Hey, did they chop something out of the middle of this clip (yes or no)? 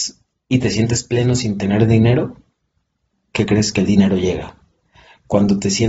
no